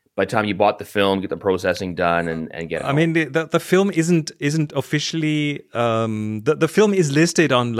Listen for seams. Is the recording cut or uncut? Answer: uncut